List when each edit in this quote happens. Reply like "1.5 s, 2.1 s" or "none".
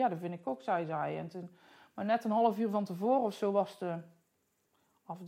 none